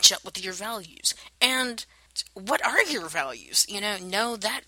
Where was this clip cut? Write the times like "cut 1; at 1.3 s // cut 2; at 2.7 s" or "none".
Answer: none